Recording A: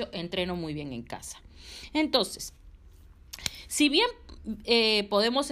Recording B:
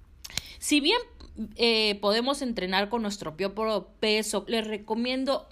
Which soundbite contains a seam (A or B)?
B